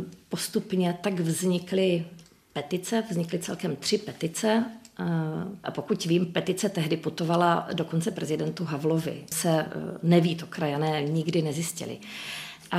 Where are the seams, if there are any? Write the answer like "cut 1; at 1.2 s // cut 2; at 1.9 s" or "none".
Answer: cut 1; at 5.6 s // cut 2; at 9.3 s